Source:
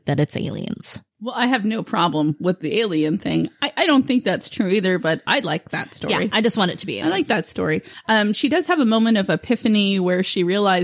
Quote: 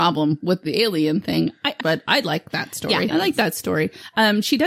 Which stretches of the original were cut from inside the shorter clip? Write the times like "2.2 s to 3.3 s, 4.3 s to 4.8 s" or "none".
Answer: 3.8 s to 5.0 s, 6.3 s to 7.0 s